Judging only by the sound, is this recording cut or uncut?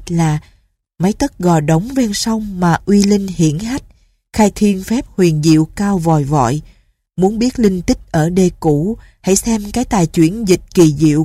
uncut